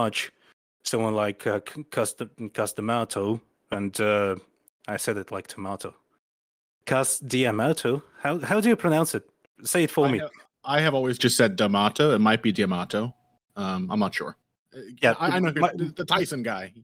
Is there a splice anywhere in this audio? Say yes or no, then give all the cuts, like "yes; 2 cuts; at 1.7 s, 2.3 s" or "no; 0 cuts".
no; 0 cuts